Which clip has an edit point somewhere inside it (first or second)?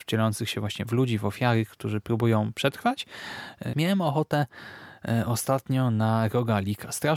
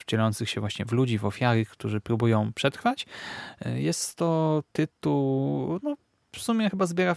first